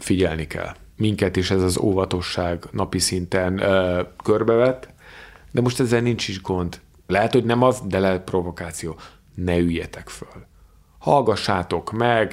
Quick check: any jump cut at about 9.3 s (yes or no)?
no